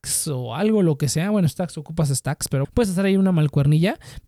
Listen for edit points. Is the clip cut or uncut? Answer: cut